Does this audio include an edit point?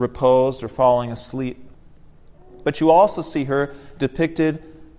no; 0 cuts

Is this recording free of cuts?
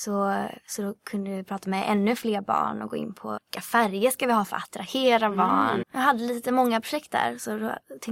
no; 2 cuts; at 3.4 s, 5.8 s

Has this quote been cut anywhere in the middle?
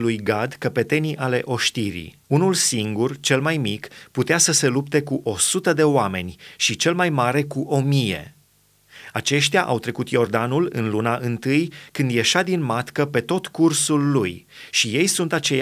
yes; 1 cut; at 2.2 s

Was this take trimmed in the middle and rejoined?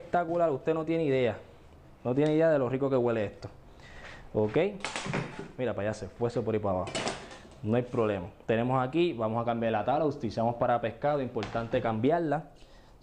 no; 0 cuts

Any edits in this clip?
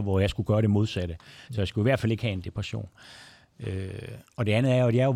no; 0 cuts

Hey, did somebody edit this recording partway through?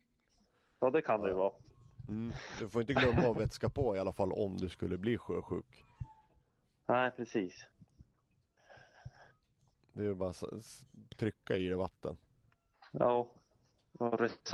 no; 0 cuts

